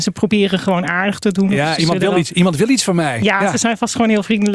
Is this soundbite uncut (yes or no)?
yes